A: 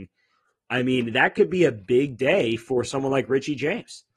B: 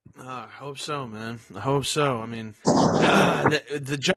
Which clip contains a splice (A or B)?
B